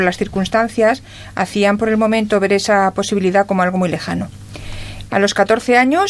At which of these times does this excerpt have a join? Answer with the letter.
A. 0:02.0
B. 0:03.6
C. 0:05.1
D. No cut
C